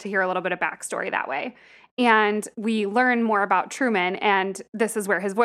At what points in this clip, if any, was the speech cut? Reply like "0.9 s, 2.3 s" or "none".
none